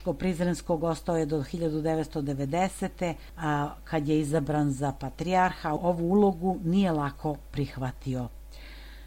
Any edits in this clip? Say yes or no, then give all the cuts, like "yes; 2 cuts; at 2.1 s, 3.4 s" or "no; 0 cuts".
no; 0 cuts